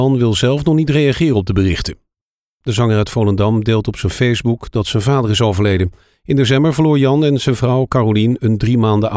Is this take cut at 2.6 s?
yes; 1 cut; at 2.6 s

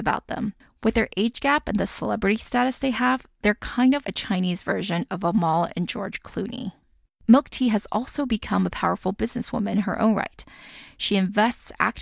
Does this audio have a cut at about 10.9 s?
no; 2 cuts; at 4.0 s, 7.1 s

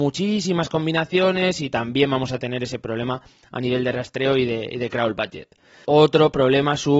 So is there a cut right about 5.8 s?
yes; 1 cut; at 5.8 s

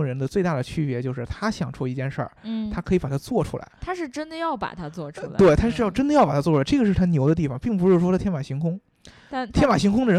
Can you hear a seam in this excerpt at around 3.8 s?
yes; 1 cut; at 3.8 s

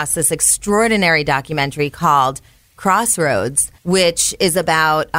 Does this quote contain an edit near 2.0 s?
no; 1 cut; at 3.8 s

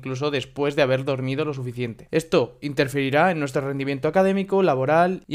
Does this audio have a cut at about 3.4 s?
no; 1 cut; at 2.1 s

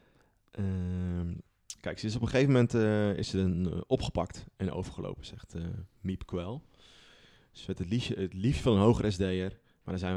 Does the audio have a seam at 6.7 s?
no; 0 cuts

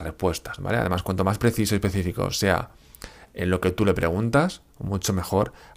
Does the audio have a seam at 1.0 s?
no; 0 cuts

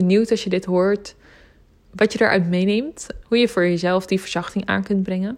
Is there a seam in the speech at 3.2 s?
yes; 1 cut; at 3.2 s

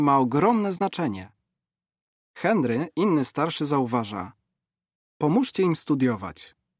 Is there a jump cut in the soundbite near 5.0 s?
yes; 1 cut; at 5.0 s

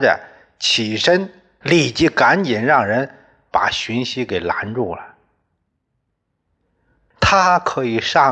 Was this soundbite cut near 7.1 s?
yes; 2 cuts; at 1.6 s, 7.1 s

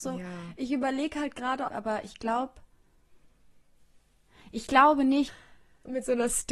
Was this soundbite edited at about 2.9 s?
no; 2 cuts; at 1.7 s, 5.3 s

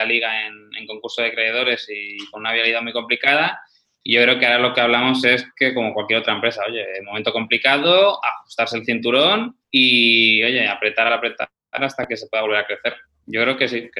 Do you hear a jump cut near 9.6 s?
yes; 2 cuts; at 9.6 s, 11.1 s

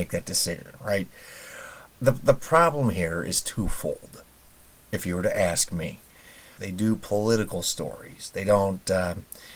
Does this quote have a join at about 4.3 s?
no; 2 cuts; at 1.9 s, 6.6 s

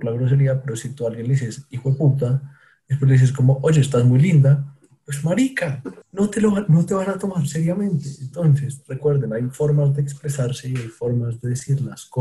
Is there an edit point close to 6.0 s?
yes; 1 cut; at 6.0 s

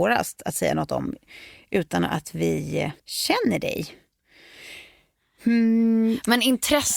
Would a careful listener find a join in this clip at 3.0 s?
yes; 1 cut; at 3.0 s

